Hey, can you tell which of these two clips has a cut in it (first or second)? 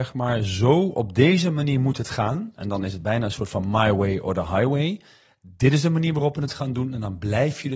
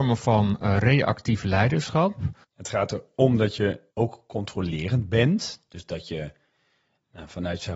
second